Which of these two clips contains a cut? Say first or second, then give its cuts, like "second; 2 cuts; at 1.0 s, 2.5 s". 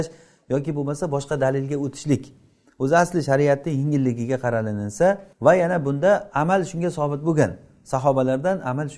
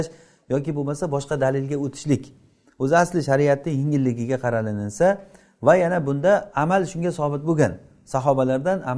first; 1 cut; at 5.3 s